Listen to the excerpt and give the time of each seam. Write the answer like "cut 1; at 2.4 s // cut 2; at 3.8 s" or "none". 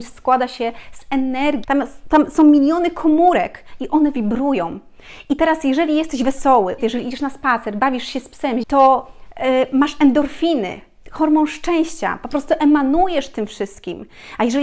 cut 1; at 1.6 s // cut 2; at 6.8 s // cut 3; at 8.6 s